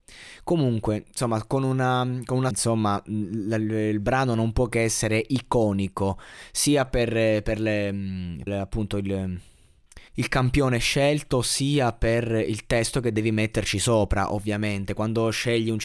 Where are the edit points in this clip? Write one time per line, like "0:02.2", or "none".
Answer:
0:02.5
0:08.5
0:10.1